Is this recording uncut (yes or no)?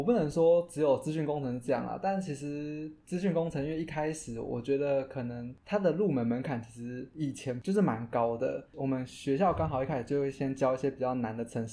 yes